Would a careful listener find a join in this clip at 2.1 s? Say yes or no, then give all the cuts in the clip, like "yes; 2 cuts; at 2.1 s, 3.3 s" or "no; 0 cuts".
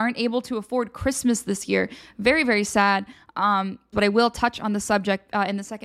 no; 1 cut; at 3.9 s